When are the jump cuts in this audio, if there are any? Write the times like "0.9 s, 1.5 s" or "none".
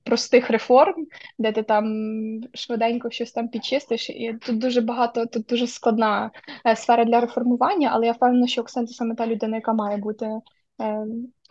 4.4 s